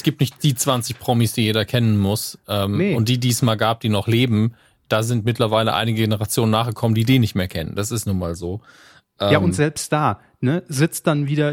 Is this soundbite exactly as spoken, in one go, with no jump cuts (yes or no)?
yes